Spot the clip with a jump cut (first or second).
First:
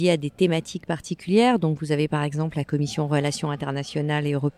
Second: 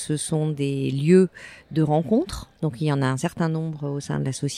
second